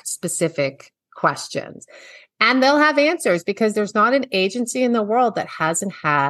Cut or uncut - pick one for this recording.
uncut